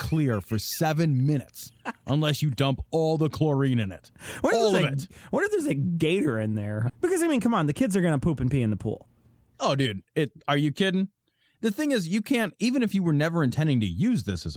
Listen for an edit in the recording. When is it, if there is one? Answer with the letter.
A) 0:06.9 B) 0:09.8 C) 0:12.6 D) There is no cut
A